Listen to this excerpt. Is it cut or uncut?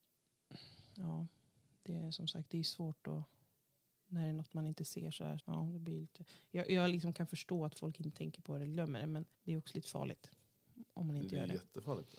cut